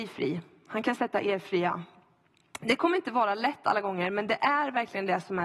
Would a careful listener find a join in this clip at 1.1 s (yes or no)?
no